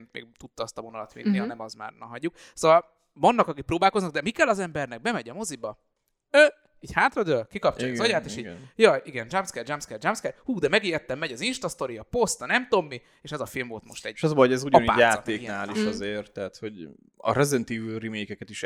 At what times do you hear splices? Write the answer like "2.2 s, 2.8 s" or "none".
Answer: none